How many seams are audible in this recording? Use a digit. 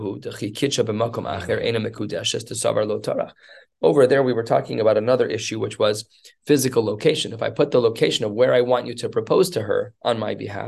0